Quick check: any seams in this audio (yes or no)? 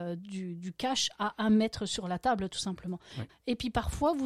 yes